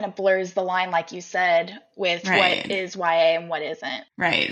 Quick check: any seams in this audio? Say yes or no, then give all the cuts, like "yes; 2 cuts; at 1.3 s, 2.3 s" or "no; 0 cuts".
no; 0 cuts